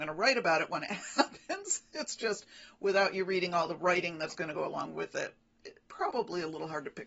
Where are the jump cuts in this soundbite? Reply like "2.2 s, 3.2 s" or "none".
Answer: none